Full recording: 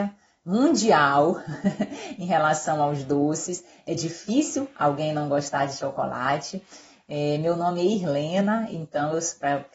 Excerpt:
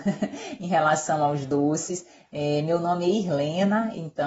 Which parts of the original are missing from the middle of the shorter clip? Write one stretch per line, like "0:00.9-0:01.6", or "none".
0:03.8-0:07.0